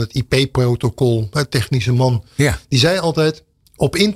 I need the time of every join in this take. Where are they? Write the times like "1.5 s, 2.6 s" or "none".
none